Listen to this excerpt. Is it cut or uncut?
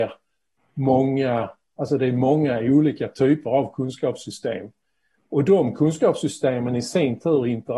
uncut